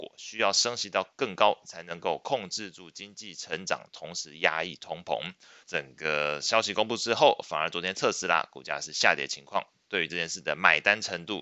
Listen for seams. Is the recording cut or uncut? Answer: cut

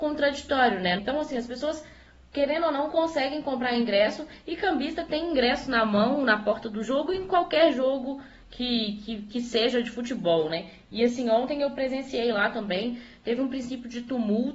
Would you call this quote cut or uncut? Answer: cut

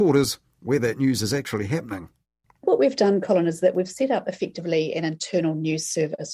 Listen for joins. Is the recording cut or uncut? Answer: uncut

